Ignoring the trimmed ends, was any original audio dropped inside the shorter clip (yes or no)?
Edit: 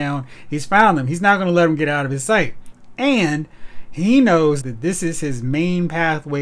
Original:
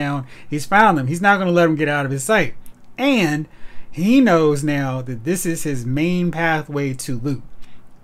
yes